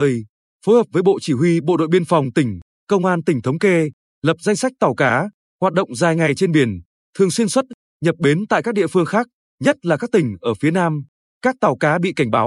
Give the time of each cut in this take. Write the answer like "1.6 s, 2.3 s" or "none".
none